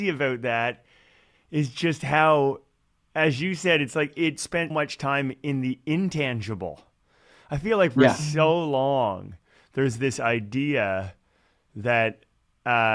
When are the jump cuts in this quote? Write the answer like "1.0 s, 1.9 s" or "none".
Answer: 4.7 s